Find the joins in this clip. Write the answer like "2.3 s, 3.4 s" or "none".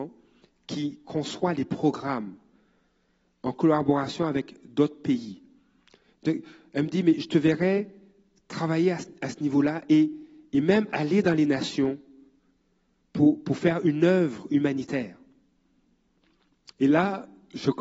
none

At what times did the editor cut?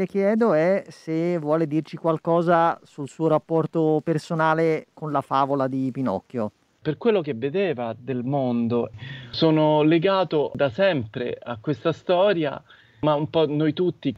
6.8 s

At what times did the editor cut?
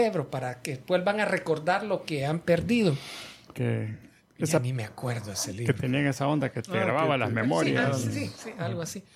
3.5 s

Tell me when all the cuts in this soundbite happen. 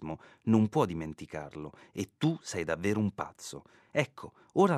3.9 s

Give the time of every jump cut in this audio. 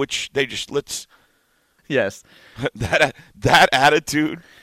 1.8 s

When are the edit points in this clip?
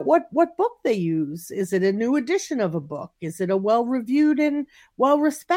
none

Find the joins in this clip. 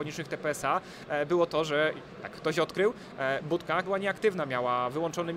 3.8 s

